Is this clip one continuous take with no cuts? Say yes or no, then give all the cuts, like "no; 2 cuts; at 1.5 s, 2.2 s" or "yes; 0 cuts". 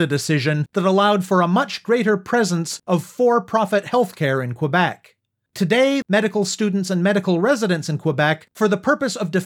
no; 1 cut; at 6.0 s